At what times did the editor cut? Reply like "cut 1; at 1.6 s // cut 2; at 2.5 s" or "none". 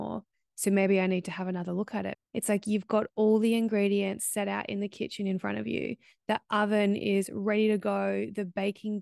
cut 1; at 2.1 s